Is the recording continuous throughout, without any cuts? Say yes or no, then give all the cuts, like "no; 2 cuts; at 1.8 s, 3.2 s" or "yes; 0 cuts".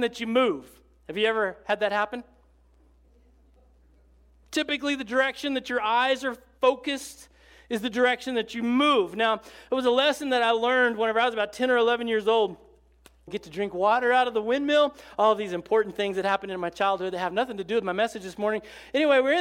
no; 1 cut; at 13.3 s